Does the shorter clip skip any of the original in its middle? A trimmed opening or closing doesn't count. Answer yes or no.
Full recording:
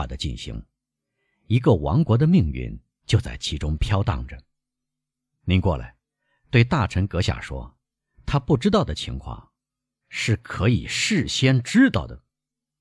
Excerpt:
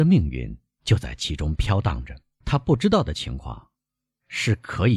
yes